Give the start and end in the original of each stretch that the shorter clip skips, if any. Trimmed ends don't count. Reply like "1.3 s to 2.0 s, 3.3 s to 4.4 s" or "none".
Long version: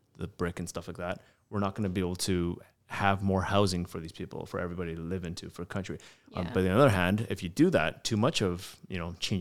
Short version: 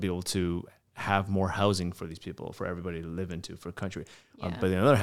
none